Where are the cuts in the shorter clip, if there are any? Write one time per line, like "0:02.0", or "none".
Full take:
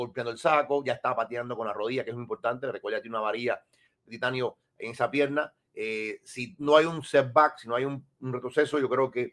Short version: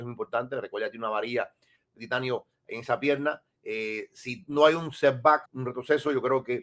0:05.5